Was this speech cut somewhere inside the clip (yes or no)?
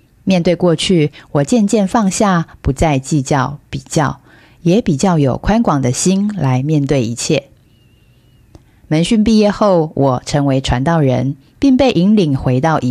no